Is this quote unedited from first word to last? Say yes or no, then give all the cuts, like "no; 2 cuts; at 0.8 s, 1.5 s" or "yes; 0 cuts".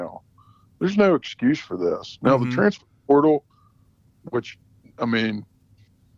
yes; 0 cuts